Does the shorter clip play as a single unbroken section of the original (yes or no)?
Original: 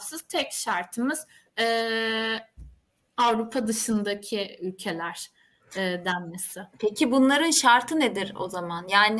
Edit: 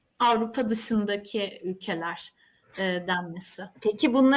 yes